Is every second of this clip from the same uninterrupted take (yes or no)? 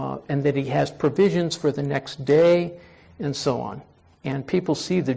no